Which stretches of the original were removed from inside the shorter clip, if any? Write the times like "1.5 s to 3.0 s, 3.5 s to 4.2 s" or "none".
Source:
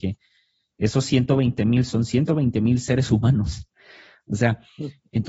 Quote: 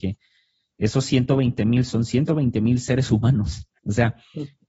3.8 s to 4.2 s